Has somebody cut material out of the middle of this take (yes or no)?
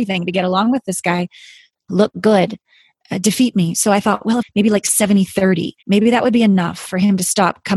yes